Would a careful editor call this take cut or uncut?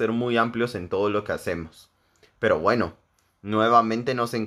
uncut